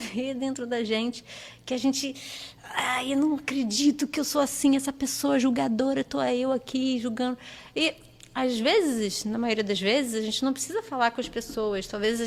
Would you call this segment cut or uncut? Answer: uncut